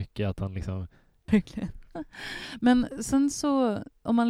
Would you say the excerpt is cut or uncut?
cut